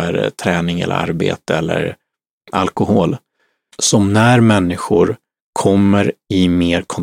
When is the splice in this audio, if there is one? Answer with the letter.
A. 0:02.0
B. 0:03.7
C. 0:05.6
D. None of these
B